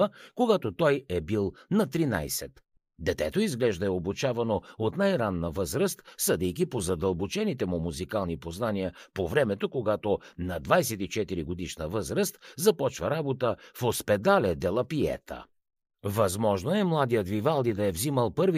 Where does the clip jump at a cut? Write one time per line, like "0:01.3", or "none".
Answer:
0:02.8
0:15.8